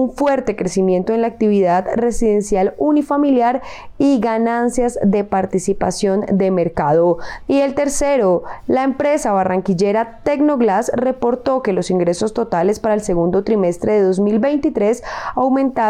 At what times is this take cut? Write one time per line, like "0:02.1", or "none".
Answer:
0:07.4